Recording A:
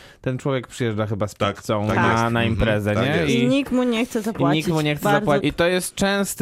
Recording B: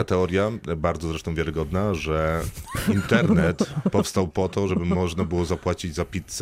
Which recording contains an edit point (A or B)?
A